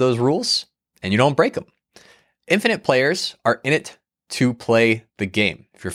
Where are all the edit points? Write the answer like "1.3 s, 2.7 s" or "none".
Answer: none